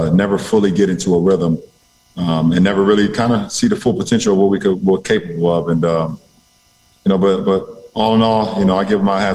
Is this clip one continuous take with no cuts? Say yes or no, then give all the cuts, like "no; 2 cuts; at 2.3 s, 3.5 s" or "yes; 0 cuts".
yes; 0 cuts